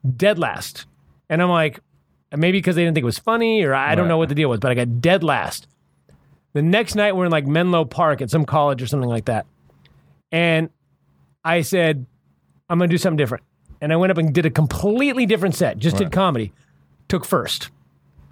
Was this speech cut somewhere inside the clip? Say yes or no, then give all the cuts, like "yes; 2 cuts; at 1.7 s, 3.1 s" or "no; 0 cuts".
no; 0 cuts